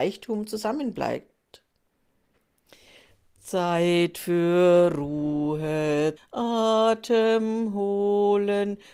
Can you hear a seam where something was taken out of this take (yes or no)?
yes